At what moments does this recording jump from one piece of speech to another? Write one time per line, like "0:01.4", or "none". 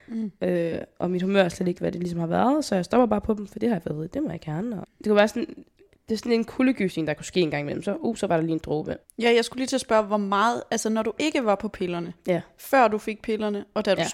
0:04.8
0:09.0

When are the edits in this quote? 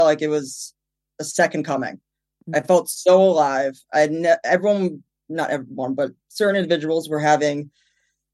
none

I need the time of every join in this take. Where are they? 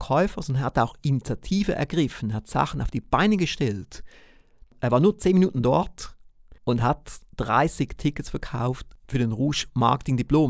0:04.7
0:06.6

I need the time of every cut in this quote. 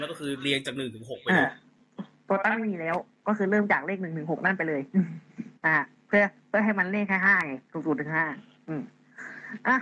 0:05.6
0:07.6

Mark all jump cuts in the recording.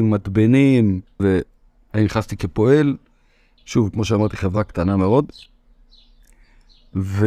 0:01.2
0:03.6

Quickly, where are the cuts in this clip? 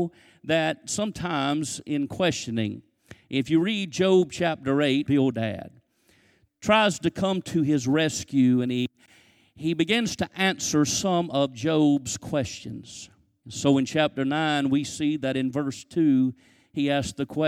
0:05.1
0:13.4

